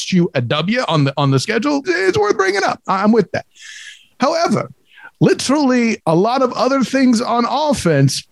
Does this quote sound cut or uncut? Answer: cut